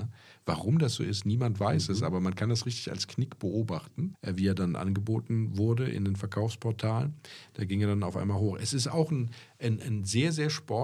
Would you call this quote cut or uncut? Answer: cut